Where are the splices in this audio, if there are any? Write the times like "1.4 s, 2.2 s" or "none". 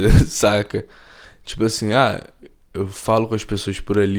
none